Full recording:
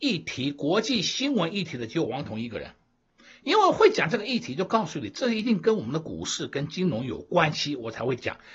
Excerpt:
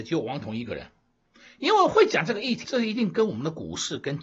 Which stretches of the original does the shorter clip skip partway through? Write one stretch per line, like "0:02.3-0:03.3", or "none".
0:04.5-0:05.1